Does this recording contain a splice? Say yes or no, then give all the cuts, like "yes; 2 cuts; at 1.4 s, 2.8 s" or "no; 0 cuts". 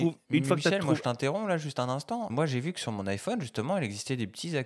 no; 0 cuts